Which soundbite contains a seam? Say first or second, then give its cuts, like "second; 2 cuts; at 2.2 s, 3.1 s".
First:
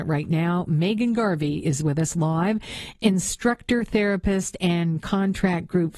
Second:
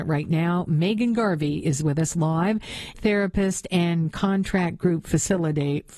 second; 1 cut; at 2.9 s